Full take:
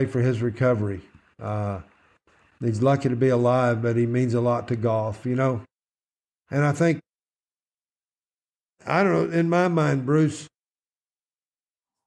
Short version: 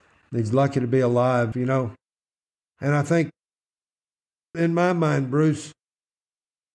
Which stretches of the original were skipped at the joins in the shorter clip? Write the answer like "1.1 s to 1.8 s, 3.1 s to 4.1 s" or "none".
3.8 s to 5.2 s, 8.2 s to 9.3 s